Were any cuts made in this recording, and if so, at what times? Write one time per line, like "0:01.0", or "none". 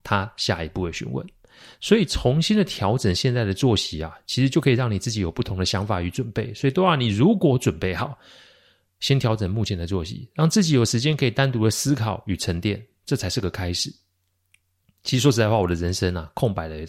none